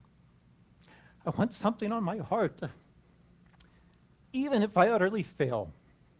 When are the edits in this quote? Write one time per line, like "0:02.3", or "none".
0:04.2

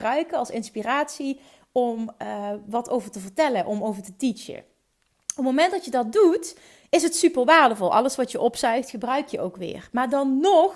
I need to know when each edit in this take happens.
none

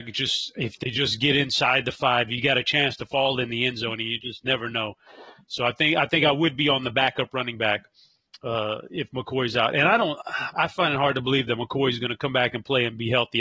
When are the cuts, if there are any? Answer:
0:10.5

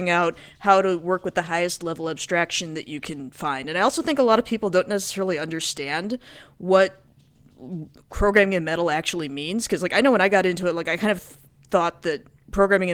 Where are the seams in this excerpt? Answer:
none

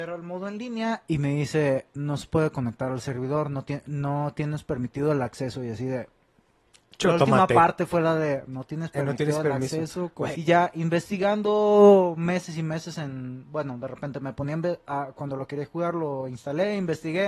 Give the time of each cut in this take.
0:10.3

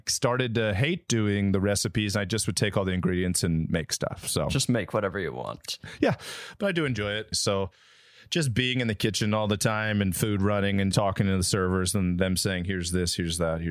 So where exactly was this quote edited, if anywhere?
0:07.3
0:10.9

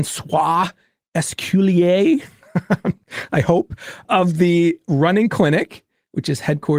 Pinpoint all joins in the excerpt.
0:04.0

